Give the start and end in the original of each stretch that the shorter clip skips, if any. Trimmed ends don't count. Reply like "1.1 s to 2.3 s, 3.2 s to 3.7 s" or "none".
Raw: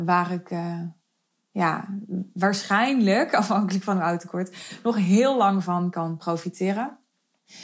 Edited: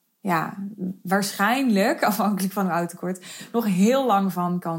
none

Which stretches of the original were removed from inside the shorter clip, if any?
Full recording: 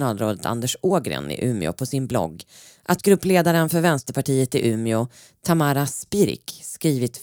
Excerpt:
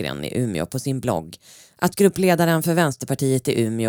none

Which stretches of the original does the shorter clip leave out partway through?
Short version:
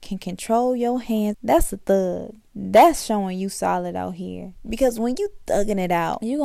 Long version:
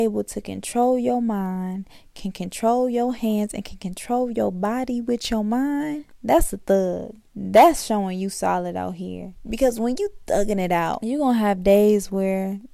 3.5 s to 6.1 s

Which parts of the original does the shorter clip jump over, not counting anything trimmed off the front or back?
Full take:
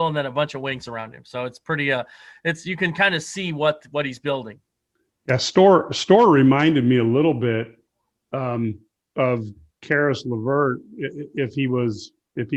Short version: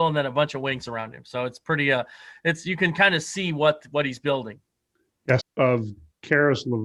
5.4 s to 9.0 s

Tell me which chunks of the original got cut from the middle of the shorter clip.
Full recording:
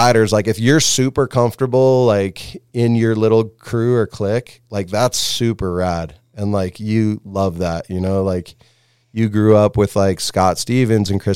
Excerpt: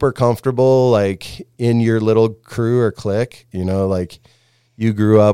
4.7 s to 7.9 s

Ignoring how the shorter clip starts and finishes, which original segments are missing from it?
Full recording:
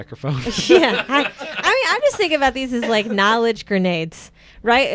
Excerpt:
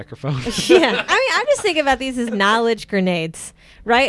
1.1 s to 1.6 s, 2.8 s to 3.0 s

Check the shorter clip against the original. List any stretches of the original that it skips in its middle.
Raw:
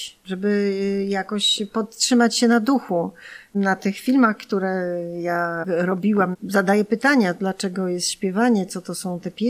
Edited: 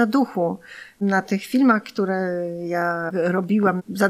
none

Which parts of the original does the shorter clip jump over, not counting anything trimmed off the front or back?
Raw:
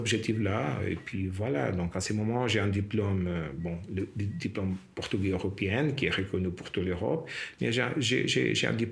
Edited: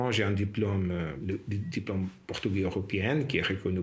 3.6 s to 3.9 s

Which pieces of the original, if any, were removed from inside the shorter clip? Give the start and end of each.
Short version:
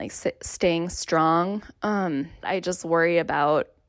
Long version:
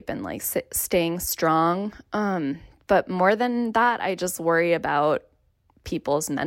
2.7 s to 4.0 s

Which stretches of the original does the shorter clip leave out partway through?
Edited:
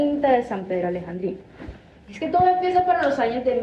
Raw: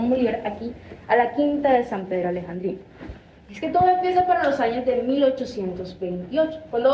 none

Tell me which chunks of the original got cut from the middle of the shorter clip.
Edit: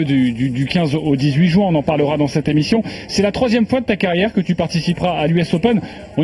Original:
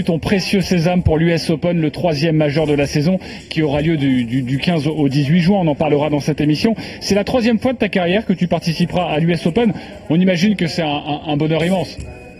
none

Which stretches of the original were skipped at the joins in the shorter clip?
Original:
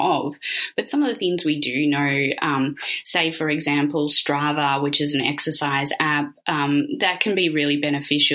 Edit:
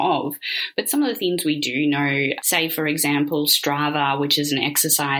2.4 s to 3.0 s

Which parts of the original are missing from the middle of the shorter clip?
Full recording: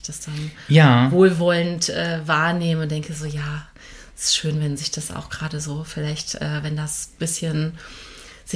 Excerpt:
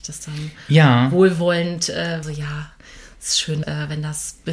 2.2 s to 3.2 s, 4.6 s to 6.4 s

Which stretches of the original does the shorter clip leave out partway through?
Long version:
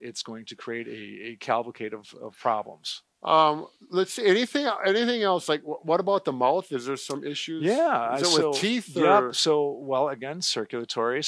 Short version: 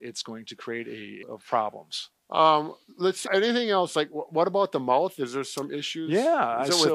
1.2 s to 2.1 s, 4.2 s to 4.8 s

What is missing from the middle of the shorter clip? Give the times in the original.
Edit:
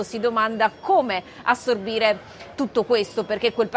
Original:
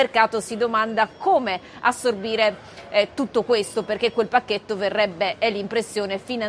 2.9 s to 3.1 s

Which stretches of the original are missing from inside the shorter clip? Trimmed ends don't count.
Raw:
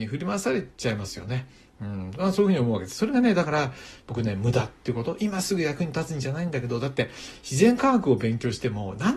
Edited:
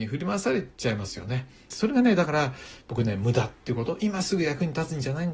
1.7 s to 2.9 s

